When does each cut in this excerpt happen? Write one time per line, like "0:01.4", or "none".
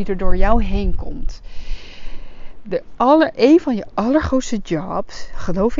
none